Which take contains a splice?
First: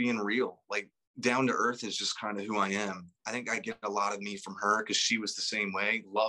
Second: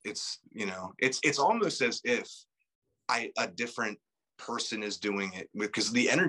first; 1 cut; at 3.2 s

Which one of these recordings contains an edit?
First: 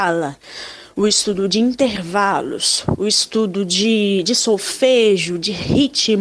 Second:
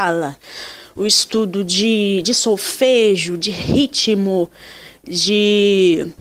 second; 1 cut; at 1.0 s

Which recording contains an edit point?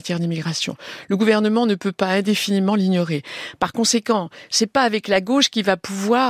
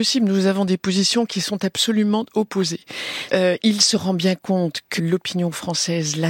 second; 2 cuts; at 3.3 s, 5.0 s

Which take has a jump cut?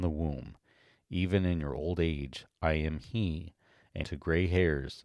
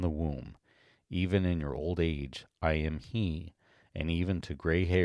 first; 1 cut; at 4.0 s

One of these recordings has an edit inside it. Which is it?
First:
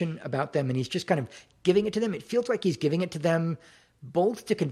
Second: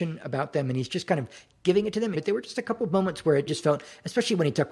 second; 2 cuts; at 2.1 s, 3.5 s

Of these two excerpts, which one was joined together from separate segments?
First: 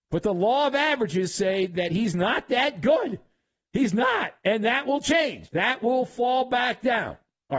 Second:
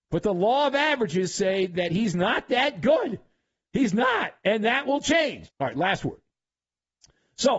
second; 1 cut; at 5.5 s

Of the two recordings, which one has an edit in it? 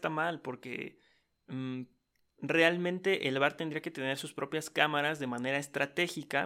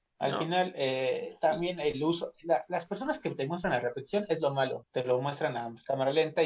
second; 1 cut; at 4.8 s

